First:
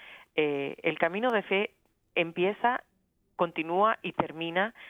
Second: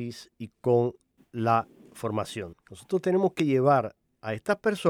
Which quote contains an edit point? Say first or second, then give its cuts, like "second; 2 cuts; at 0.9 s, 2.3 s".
second; 1 cut; at 2.5 s